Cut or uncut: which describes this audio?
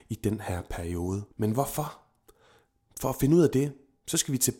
cut